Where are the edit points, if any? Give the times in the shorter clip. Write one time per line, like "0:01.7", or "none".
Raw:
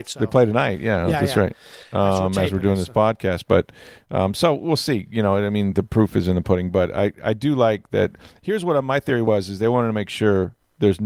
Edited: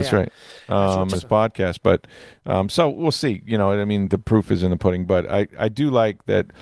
0:01.1